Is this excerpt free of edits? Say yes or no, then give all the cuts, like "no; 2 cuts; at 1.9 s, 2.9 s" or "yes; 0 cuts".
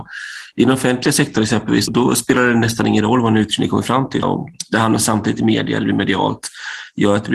no; 2 cuts; at 1.9 s, 4.2 s